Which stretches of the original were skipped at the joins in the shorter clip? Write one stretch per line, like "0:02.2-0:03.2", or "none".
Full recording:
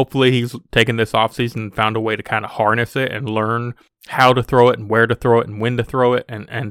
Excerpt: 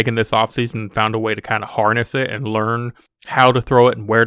none